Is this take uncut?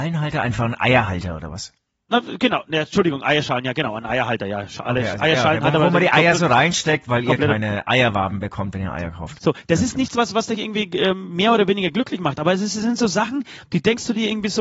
no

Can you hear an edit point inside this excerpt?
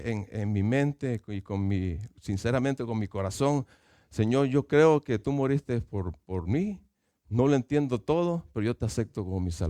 no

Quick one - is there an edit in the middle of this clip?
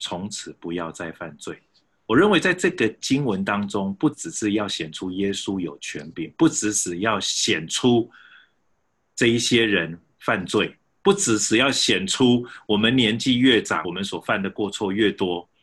yes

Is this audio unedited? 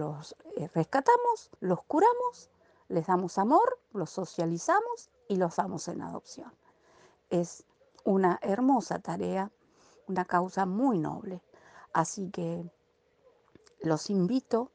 no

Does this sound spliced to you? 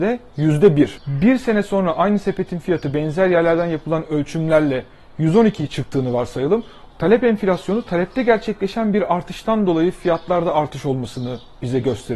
yes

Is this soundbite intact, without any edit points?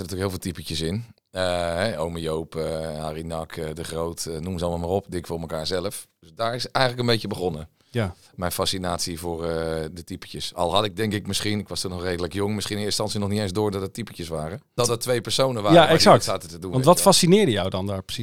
no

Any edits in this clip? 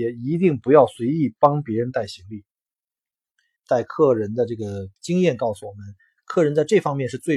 yes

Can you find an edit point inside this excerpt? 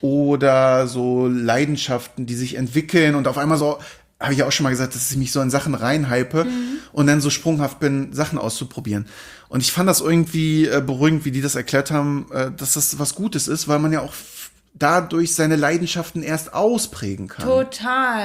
no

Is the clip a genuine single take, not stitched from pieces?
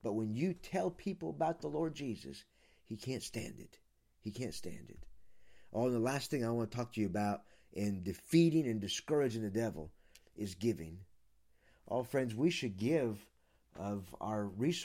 yes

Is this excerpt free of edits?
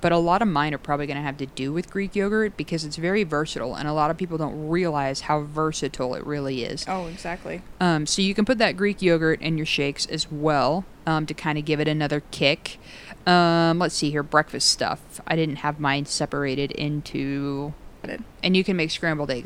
no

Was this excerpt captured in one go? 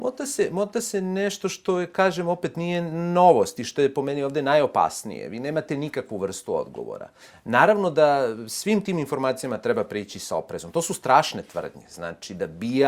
yes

